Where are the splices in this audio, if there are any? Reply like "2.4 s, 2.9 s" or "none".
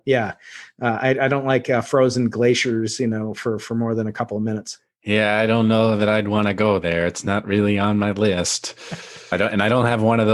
9.3 s